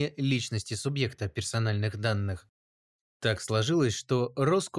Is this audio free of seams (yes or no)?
yes